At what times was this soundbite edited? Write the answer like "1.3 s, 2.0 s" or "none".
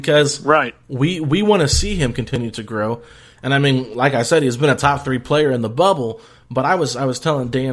none